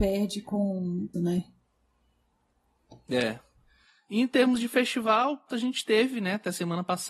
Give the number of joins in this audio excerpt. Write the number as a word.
two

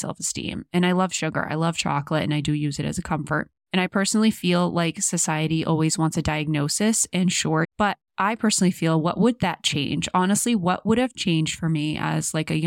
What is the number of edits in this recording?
one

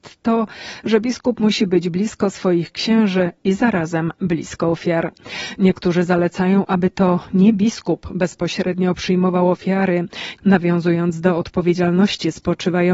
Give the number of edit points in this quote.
one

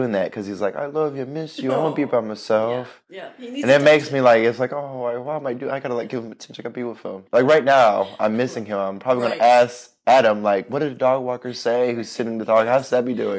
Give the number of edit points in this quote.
one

